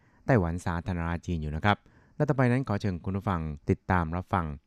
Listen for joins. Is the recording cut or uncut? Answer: cut